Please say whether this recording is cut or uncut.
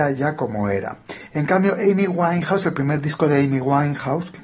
uncut